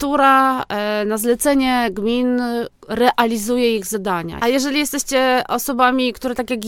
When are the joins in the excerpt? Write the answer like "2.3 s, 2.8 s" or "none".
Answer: 2.8 s, 4.4 s